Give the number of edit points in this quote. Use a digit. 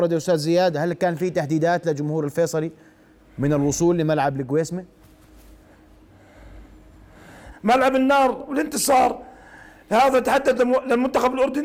1